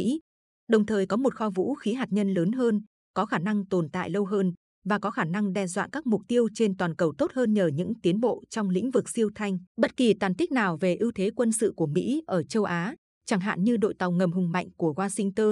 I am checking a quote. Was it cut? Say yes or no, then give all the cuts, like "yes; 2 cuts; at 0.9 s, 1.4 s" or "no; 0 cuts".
yes; 1 cut; at 9.7 s